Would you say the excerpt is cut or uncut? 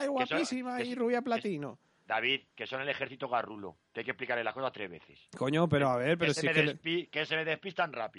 uncut